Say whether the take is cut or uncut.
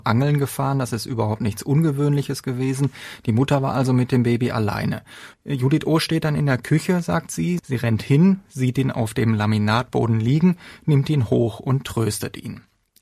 cut